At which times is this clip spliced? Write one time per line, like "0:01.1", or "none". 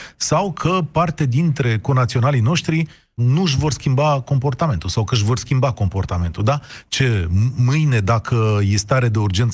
0:03.2